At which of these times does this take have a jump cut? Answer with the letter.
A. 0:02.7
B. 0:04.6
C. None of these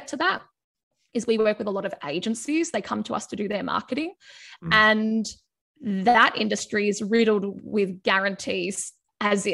C